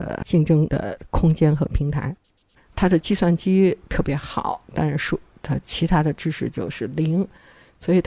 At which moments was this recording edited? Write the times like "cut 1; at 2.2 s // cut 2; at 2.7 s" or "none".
cut 1; at 2.6 s